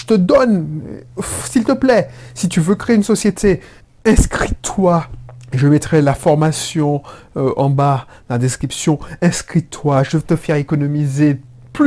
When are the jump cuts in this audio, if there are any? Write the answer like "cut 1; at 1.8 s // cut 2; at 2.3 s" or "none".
none